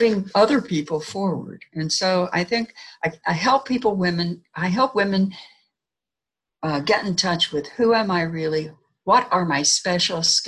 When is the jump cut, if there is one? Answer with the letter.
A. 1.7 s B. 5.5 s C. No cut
C